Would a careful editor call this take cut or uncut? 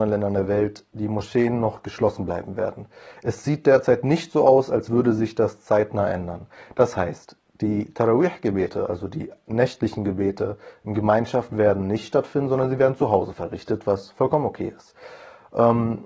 uncut